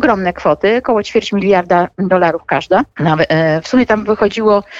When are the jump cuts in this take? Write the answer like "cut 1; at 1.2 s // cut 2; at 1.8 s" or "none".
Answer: cut 1; at 2.9 s